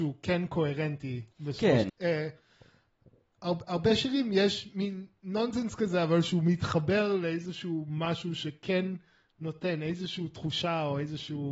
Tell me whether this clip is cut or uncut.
cut